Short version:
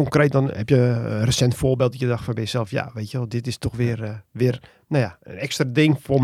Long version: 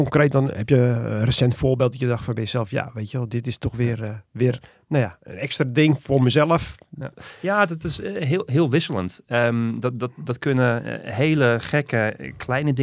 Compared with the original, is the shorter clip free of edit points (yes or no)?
yes